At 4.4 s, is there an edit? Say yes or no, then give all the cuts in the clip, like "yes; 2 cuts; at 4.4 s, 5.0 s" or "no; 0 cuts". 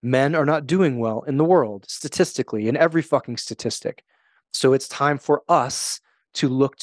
no; 0 cuts